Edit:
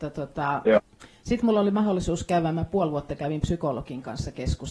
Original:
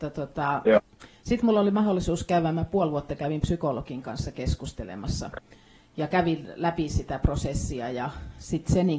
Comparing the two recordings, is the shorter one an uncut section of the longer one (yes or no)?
yes